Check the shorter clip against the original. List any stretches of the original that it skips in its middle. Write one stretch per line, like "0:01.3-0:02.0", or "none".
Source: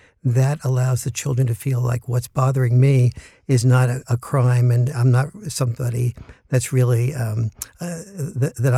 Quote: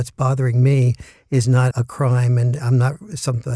0:03.9-0:04.0